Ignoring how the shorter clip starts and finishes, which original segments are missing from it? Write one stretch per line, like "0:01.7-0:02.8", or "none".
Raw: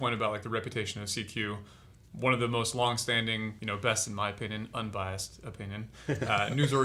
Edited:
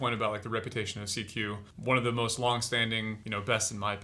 0:01.7-0:02.1